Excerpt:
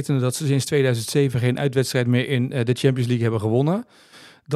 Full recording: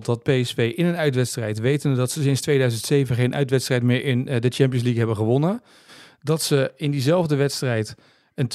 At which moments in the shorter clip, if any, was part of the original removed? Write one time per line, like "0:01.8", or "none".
none